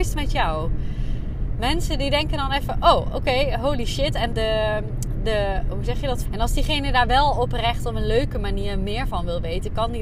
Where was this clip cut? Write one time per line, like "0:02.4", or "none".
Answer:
0:04.3
0:06.2